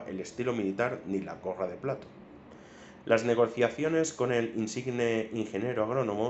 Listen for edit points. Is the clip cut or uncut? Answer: cut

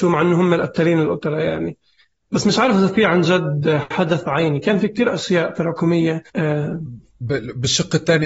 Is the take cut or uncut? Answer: cut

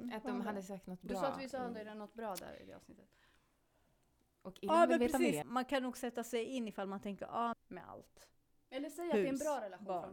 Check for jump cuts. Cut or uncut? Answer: cut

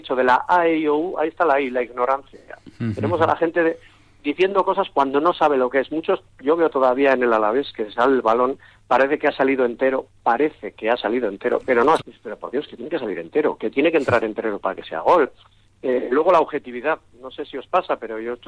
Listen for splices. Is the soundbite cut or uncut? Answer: cut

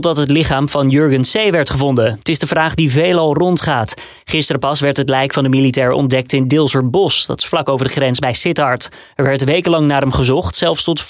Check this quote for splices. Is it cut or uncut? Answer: uncut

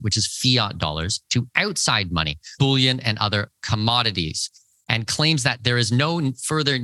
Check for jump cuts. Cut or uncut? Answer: cut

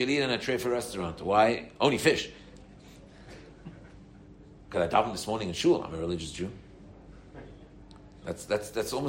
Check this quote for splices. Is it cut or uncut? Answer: uncut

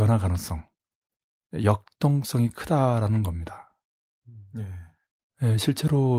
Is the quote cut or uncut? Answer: uncut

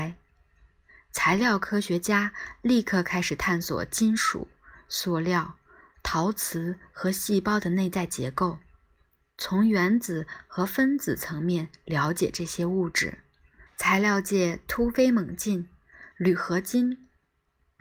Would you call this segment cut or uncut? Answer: cut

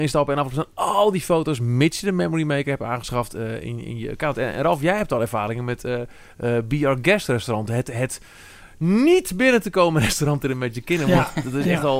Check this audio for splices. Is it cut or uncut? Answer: uncut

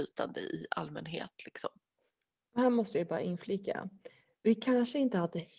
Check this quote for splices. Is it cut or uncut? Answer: uncut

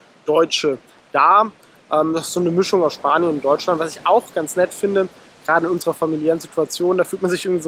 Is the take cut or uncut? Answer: uncut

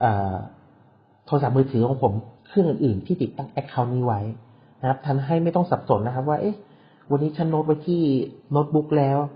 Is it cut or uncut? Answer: cut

